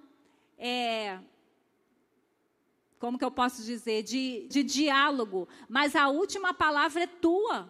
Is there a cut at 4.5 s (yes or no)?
yes